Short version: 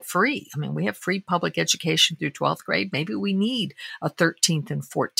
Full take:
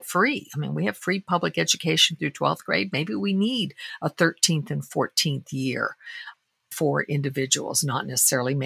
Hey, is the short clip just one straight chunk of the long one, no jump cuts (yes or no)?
yes